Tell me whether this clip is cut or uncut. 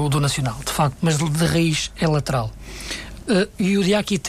cut